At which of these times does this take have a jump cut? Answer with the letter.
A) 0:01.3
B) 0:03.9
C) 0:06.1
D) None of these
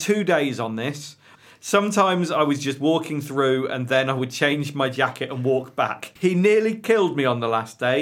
A